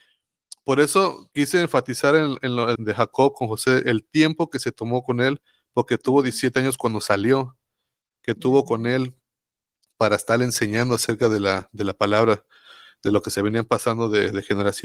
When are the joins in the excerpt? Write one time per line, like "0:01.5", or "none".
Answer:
0:02.8